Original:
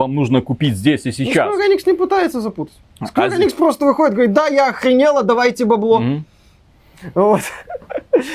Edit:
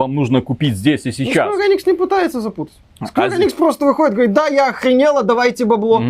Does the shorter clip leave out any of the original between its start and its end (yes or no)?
no